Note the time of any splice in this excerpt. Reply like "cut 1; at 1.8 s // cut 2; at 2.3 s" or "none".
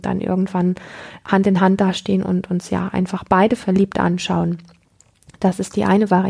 none